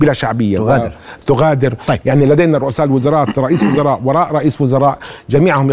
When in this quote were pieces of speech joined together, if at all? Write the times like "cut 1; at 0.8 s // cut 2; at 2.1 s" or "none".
cut 1; at 2.0 s